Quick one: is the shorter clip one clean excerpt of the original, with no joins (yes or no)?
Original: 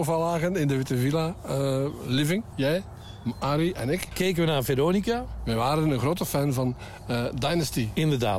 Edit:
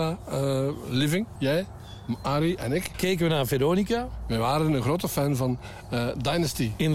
yes